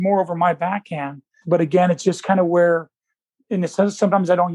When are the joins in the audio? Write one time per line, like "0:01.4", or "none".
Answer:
0:01.4